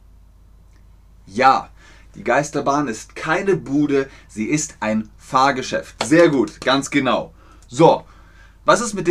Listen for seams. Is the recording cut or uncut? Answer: uncut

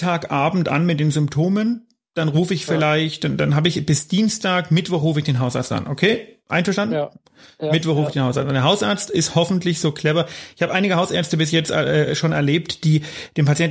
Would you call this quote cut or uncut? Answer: uncut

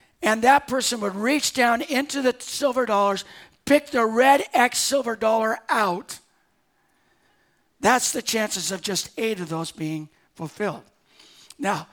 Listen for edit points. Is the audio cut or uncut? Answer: uncut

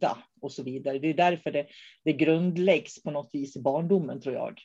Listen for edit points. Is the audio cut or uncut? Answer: uncut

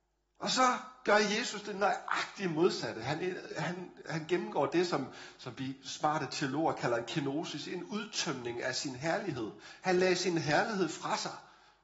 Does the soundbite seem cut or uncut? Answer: uncut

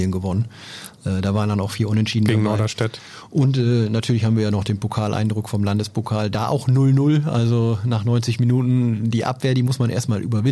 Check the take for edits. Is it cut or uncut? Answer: uncut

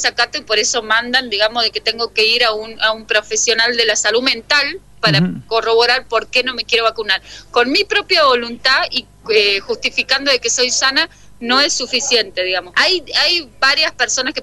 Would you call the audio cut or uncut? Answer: cut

